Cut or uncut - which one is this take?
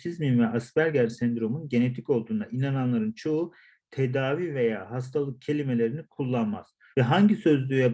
cut